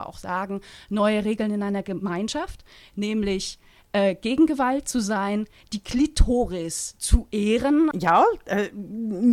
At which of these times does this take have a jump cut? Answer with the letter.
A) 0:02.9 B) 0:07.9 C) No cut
B